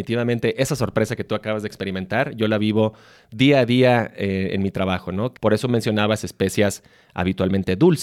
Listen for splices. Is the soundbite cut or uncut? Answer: cut